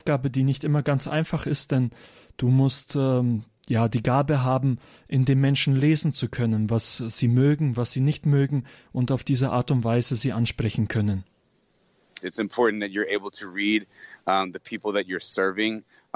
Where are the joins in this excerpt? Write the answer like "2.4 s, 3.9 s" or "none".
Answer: 12.2 s